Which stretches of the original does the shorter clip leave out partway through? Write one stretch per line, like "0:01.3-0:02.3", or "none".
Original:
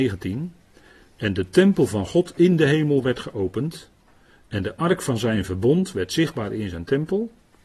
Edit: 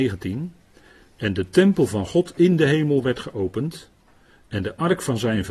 none

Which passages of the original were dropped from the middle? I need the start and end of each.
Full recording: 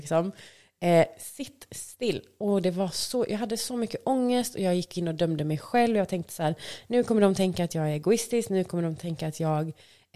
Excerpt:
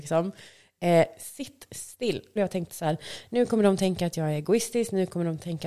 0:02.4-0:05.9

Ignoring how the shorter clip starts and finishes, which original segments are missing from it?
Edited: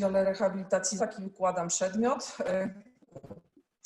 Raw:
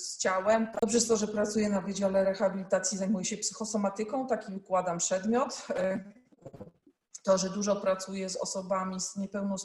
0:03.0-0:04.3

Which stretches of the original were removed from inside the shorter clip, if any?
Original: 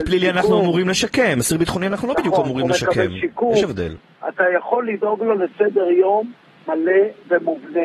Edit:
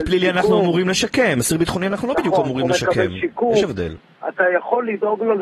none

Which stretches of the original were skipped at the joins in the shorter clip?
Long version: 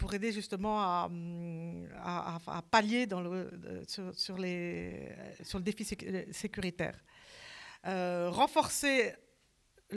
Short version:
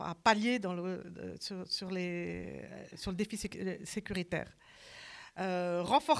none

